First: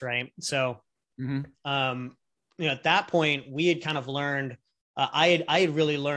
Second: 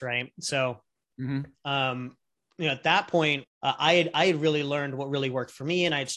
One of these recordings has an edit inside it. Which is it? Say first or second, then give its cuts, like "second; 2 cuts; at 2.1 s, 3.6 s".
second; 1 cut; at 3.4 s